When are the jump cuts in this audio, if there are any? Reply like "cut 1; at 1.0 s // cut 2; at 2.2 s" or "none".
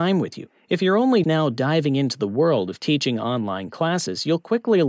cut 1; at 1.2 s